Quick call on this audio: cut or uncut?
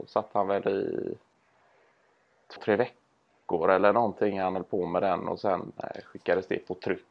cut